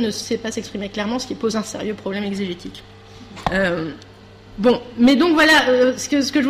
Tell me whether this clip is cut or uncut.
cut